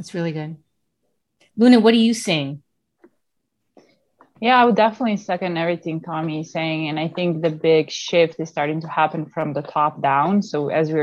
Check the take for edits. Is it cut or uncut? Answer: uncut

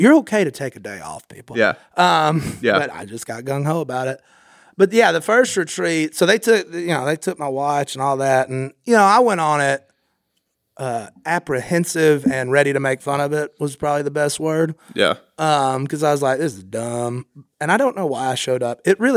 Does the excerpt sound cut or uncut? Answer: uncut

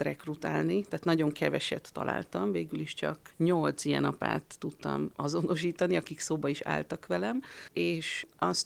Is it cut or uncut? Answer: uncut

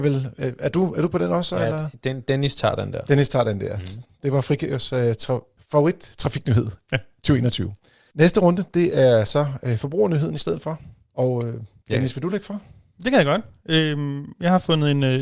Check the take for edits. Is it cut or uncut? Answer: uncut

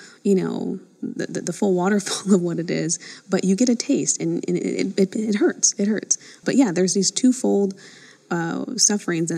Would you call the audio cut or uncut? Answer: uncut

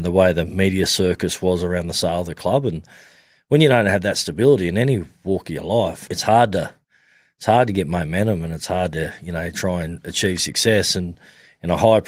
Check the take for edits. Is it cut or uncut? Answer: cut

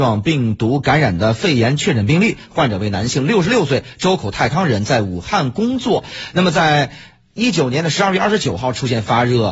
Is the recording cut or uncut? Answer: uncut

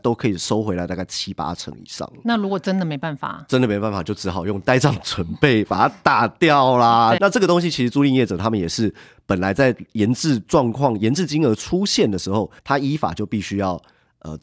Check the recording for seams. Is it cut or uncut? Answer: cut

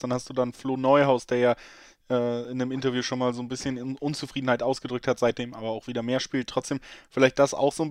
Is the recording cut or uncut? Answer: uncut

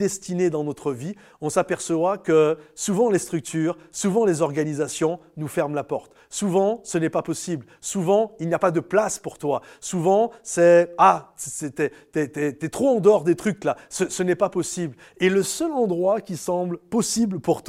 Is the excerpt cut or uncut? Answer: uncut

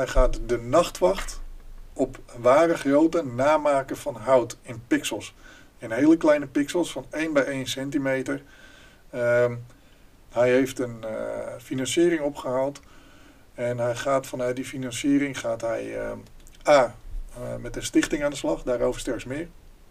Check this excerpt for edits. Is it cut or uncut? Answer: cut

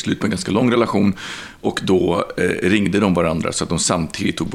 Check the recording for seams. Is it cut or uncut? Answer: uncut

